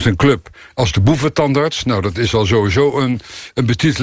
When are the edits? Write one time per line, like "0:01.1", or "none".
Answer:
none